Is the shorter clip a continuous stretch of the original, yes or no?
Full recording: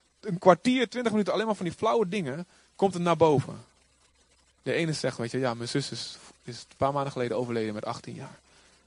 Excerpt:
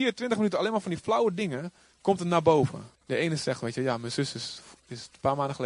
no